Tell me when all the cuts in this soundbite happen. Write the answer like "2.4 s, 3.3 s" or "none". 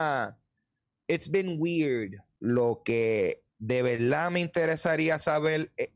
2.4 s, 3.5 s